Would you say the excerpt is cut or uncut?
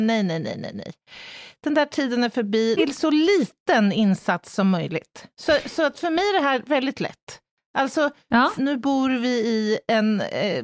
cut